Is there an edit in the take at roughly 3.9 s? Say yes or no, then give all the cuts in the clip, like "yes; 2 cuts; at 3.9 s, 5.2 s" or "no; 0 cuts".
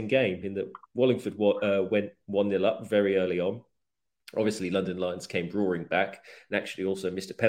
no; 0 cuts